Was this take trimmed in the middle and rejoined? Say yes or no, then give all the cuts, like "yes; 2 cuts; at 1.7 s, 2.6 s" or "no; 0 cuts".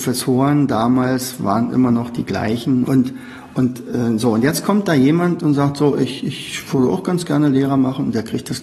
yes; 1 cut; at 2.8 s